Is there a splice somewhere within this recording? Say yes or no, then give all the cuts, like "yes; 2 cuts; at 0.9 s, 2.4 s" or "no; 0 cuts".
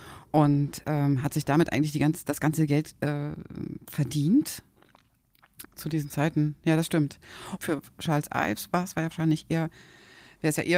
yes; 2 cuts; at 5.6 s, 7.6 s